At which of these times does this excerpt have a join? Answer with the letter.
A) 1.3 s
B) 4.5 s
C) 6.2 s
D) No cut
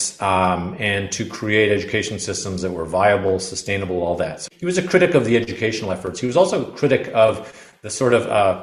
B